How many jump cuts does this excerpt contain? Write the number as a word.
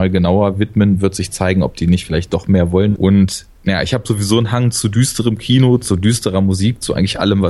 one